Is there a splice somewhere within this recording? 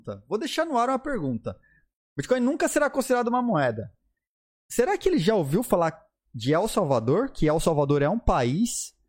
no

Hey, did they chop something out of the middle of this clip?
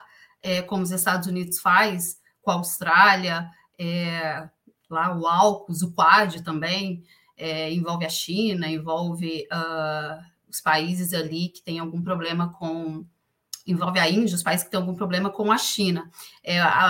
no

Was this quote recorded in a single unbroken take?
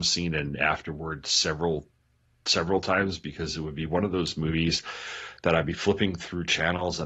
yes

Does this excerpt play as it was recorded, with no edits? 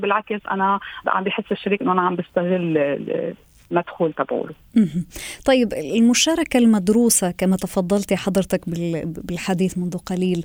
no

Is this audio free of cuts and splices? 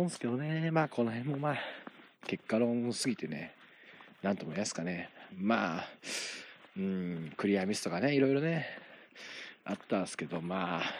yes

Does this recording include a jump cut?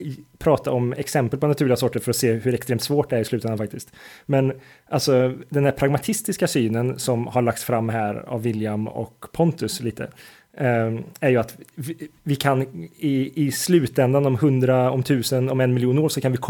no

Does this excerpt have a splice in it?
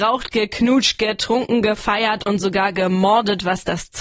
no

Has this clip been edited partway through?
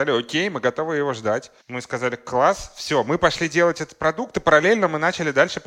yes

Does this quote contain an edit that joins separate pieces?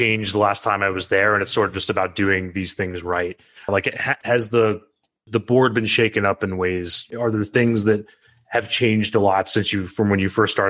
yes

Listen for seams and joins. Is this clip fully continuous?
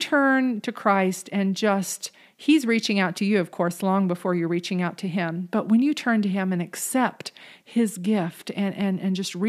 yes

